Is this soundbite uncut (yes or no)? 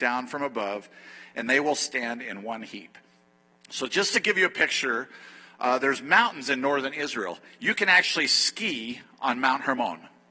yes